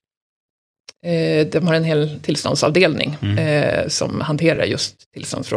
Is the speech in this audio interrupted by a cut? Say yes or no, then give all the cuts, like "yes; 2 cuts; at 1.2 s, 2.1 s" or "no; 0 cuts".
no; 0 cuts